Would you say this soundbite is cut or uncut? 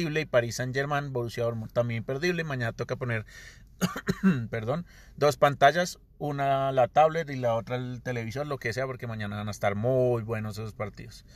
uncut